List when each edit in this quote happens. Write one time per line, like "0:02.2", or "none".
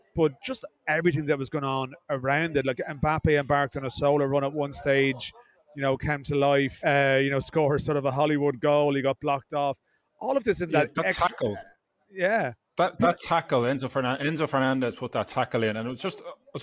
0:06.8